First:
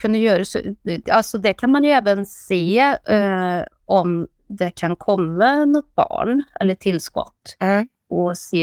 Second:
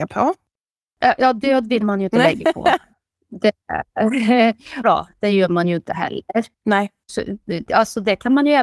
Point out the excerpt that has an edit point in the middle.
second; 2 cuts; at 4.8 s, 7.1 s

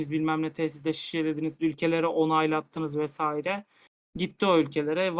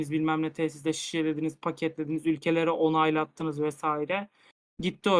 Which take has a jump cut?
first; 1 cut; at 1.6 s

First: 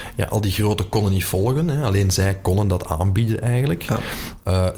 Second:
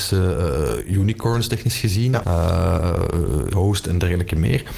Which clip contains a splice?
second; 2 cuts; at 2.2 s, 3.5 s

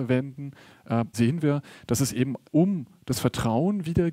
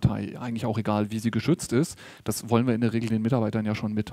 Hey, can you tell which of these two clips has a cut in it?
first; 2 cuts; at 1.1 s, 2.5 s

